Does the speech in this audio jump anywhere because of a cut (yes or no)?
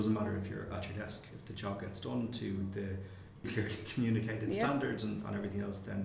yes